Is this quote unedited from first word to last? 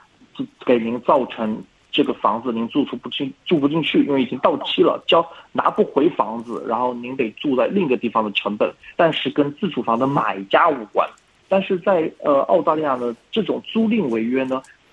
no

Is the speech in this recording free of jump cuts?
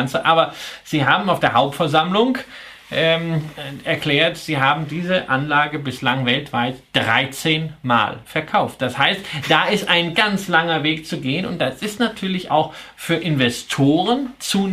no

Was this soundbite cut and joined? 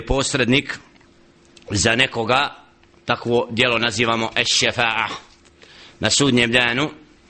no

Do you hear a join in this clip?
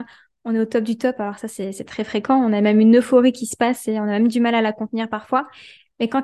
no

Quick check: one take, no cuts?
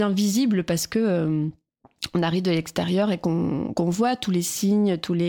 yes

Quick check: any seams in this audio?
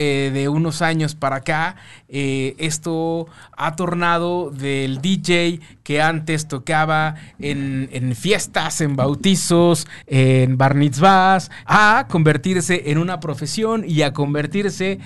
yes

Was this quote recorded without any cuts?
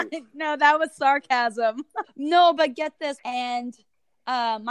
no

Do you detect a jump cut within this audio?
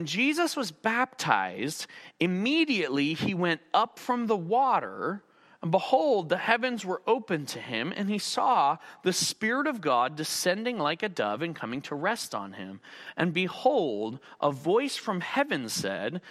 no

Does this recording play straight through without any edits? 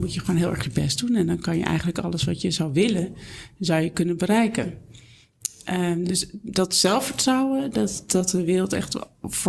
yes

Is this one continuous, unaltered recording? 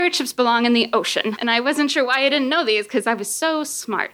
no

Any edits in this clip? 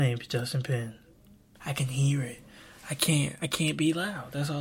yes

